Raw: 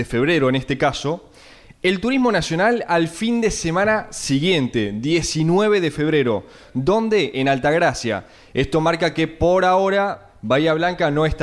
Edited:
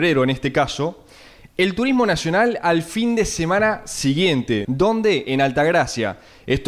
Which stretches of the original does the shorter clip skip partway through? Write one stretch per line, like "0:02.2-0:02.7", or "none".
0:04.9-0:06.7